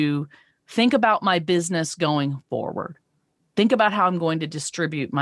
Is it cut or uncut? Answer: cut